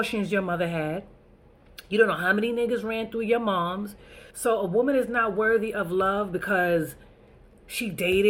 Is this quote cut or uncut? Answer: cut